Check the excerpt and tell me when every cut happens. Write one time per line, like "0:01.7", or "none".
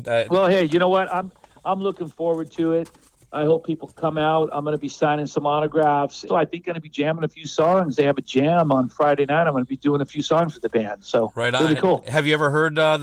0:06.3